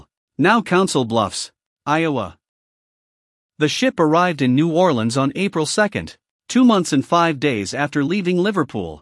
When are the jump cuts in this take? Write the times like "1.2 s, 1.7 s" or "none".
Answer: 3.4 s